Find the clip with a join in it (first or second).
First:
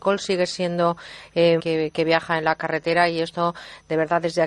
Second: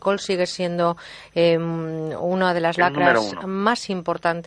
first